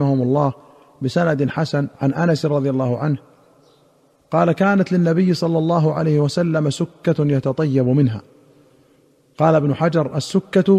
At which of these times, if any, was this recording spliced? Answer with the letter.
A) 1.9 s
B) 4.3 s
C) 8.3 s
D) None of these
A